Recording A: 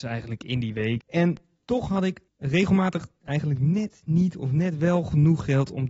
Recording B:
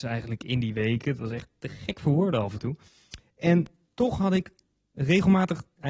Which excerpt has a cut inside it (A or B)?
A